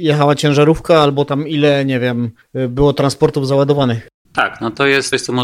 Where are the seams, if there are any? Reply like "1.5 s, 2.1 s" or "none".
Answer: 4.2 s

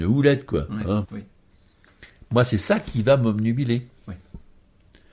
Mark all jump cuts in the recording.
1.0 s

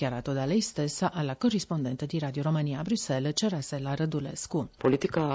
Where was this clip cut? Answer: none

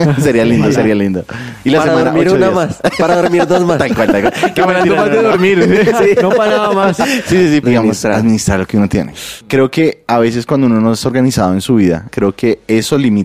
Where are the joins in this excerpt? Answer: 7.6 s, 9.4 s, 12.1 s

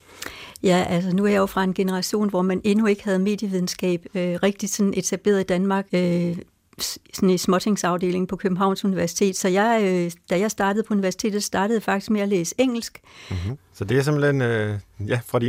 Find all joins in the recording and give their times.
5.9 s, 13.6 s

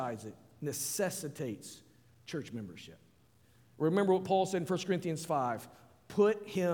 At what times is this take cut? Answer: none

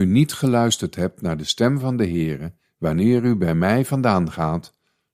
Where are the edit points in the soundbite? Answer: 2.7 s

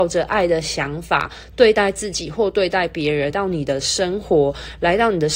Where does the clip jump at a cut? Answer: 3.3 s

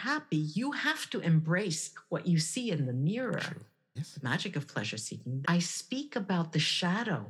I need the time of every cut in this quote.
4.0 s, 5.4 s

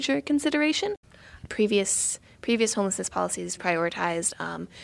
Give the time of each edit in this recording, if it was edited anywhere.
1.5 s, 3.6 s

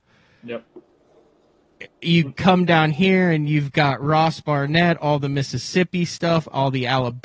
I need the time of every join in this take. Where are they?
none

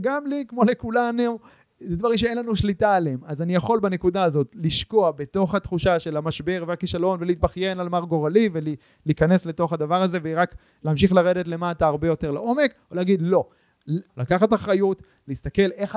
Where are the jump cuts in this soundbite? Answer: 14.1 s

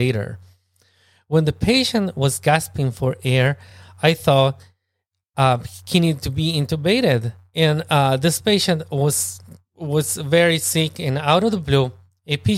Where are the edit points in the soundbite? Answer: none

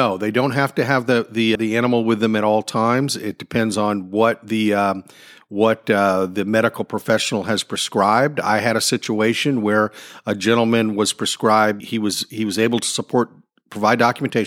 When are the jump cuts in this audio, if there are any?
1.6 s, 11.8 s

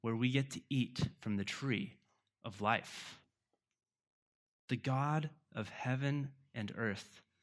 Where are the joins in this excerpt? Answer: 4.5 s

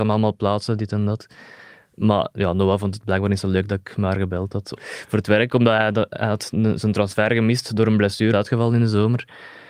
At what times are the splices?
4.8 s, 8.3 s

